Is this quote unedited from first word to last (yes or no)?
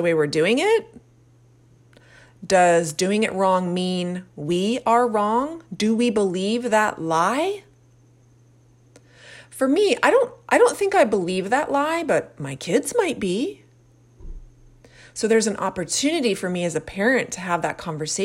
yes